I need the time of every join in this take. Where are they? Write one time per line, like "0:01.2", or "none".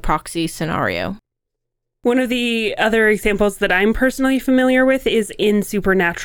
none